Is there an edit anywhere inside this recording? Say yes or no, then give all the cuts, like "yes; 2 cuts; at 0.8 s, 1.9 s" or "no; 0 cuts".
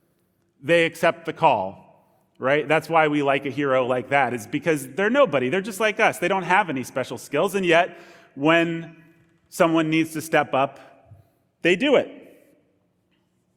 no; 0 cuts